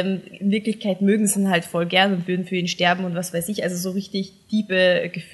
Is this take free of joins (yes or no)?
yes